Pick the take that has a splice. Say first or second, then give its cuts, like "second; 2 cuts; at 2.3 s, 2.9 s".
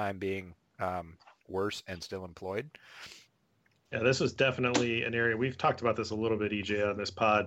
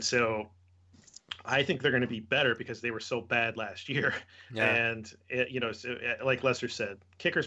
first; 1 cut; at 3.9 s